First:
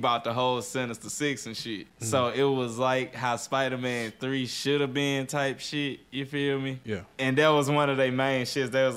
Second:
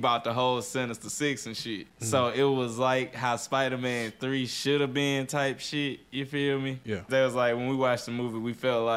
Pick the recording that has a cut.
second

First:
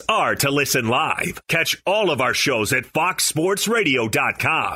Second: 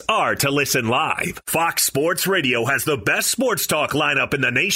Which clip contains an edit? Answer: first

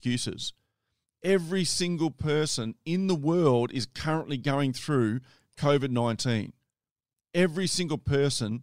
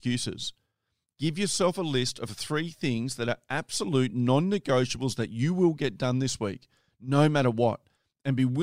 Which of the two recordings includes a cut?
second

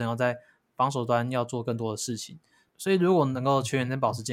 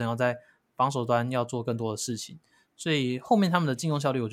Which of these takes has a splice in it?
first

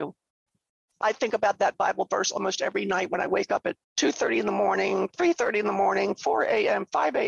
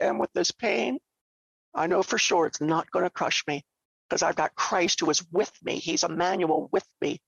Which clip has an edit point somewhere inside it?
first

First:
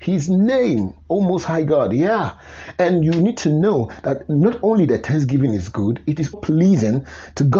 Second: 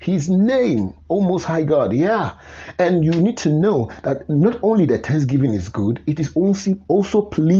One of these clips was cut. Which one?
first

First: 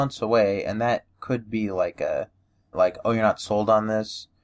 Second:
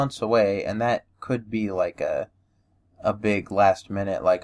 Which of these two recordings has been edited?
first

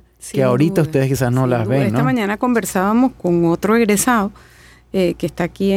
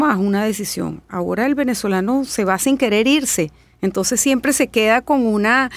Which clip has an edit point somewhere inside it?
first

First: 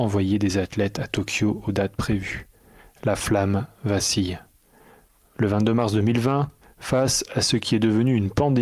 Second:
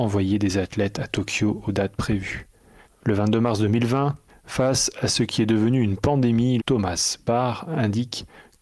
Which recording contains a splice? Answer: second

